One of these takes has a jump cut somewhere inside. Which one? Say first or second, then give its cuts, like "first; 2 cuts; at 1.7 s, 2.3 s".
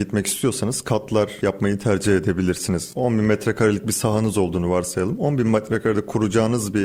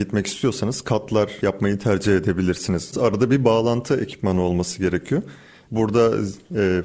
second; 2 cuts; at 2.9 s, 5.6 s